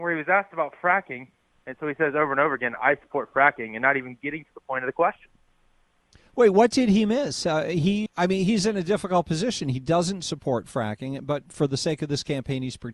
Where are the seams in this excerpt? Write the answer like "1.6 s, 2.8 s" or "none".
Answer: 1.5 s, 8.1 s